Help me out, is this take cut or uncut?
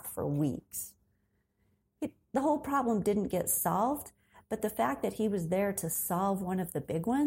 uncut